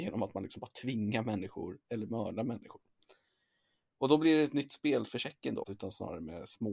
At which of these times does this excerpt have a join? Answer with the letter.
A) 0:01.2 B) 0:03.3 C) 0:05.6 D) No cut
C